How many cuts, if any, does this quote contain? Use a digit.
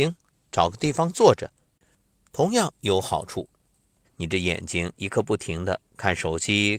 1